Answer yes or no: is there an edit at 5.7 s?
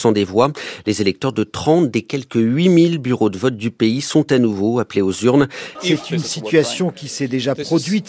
yes